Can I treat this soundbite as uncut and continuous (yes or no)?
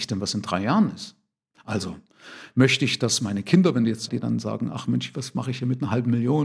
no